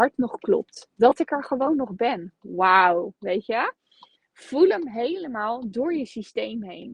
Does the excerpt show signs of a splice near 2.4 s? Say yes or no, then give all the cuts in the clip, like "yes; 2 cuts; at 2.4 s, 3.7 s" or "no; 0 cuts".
no; 0 cuts